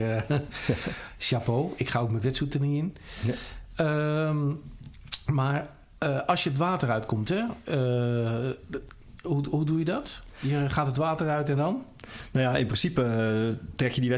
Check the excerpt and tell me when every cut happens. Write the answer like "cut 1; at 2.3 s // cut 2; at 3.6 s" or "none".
none